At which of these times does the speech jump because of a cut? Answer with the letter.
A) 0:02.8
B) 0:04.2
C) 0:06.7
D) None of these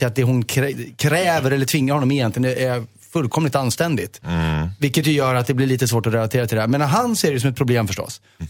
D